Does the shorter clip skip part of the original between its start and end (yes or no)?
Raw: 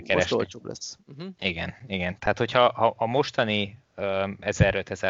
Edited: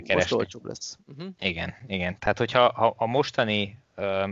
no